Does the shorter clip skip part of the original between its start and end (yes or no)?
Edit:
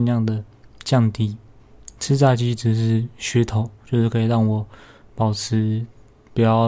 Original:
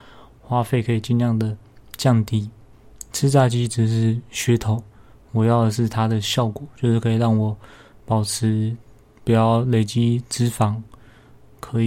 yes